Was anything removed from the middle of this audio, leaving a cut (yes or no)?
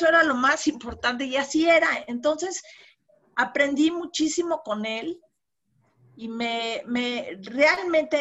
no